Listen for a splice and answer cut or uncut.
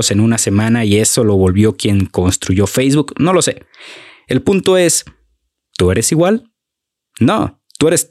uncut